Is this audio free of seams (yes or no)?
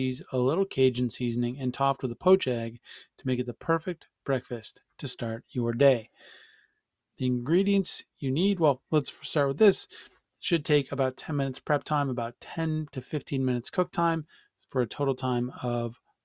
yes